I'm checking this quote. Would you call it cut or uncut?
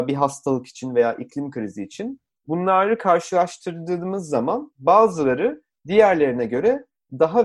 uncut